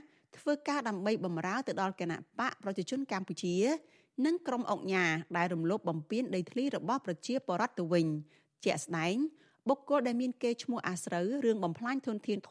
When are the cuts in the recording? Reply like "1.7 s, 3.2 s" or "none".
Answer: none

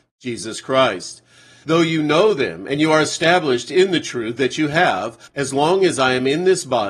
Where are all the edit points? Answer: 1.6 s, 5.3 s

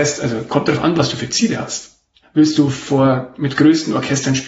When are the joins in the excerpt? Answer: 2.2 s

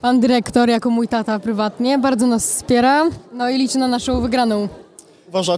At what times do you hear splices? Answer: none

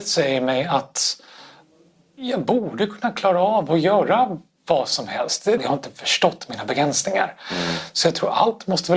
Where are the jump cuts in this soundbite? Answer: 5.6 s

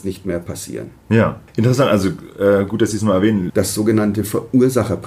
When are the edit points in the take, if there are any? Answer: 1.5 s, 3.5 s

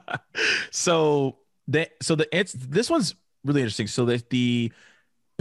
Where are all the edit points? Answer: none

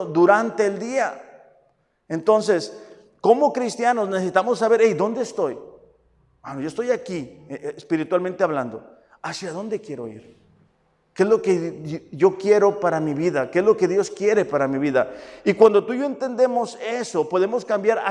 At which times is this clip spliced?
none

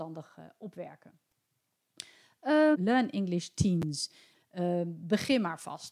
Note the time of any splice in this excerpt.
2.7 s, 4.3 s

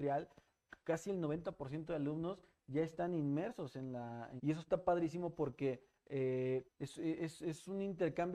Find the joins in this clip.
4.4 s, 6.6 s

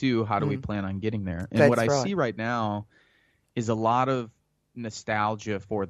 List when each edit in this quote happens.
none

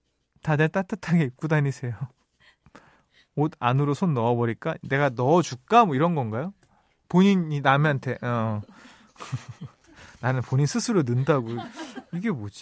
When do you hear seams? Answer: none

